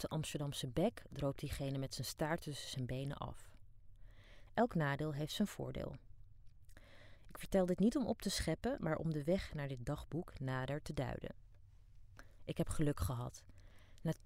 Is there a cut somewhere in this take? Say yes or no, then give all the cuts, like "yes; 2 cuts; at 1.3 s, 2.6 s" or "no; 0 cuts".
yes; 3 cuts; at 4.5 s, 7.2 s, 12.4 s